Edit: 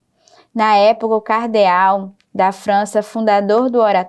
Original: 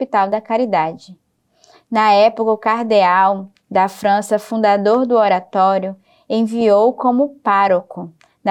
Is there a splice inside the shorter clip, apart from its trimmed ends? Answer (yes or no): no